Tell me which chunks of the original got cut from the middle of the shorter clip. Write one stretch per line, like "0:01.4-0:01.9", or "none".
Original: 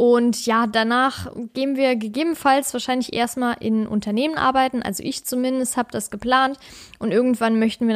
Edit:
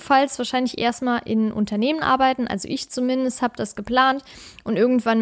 none